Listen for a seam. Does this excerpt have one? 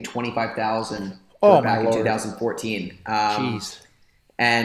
no; 0 cuts

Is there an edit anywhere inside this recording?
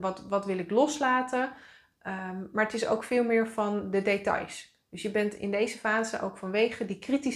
no; 0 cuts

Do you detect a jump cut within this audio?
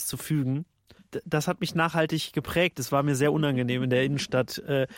no; 0 cuts

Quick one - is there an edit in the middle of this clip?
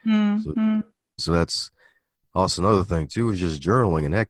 yes; 1 cut; at 1.2 s

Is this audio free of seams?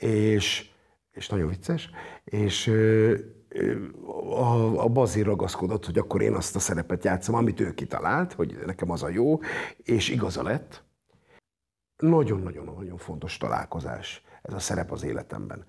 yes; 0 cuts

